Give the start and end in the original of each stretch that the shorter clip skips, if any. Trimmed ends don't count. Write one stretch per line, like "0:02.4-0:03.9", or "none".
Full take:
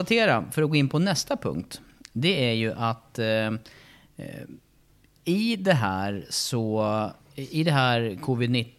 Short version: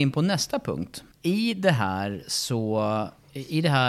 0:01.9-0:05.1